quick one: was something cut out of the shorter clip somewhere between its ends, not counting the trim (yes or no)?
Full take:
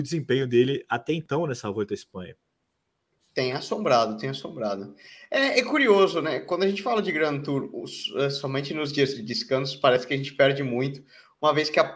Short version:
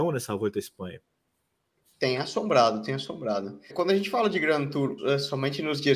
yes